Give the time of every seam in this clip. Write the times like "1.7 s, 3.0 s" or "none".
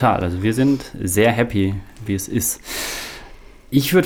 2.1 s